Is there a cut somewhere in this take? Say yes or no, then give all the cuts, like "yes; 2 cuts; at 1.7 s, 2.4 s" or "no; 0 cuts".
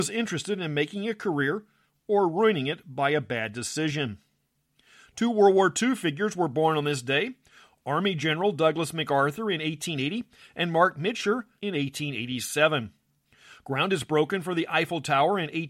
yes; 1 cut; at 11.6 s